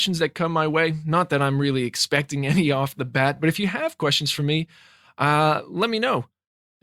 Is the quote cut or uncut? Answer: uncut